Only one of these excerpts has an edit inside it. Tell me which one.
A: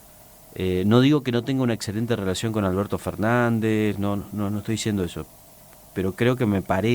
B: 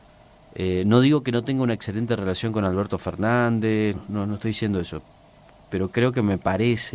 B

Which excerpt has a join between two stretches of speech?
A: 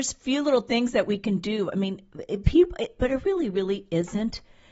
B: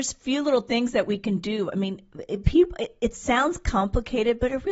A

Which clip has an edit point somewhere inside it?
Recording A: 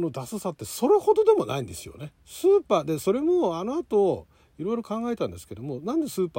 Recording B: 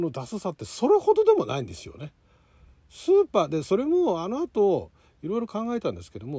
A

